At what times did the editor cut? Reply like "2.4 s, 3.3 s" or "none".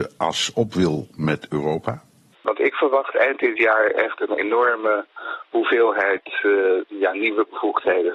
2.3 s

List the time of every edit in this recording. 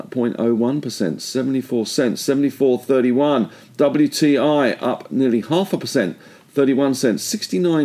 none

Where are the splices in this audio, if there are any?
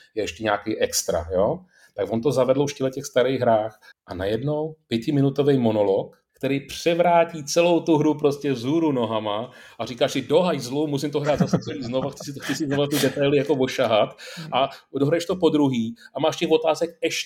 3.9 s, 6.3 s

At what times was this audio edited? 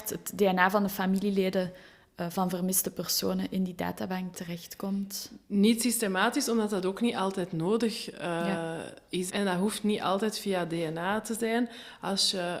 9.3 s

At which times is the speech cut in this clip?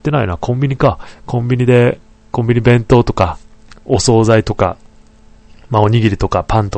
none

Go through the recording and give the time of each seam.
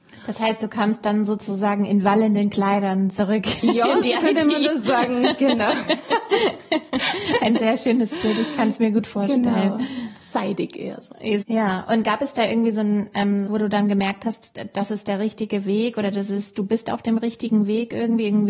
11.4 s, 13.5 s

